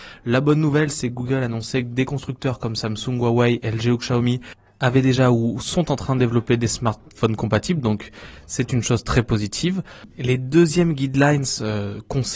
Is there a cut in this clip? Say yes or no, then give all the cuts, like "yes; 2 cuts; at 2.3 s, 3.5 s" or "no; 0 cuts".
no; 0 cuts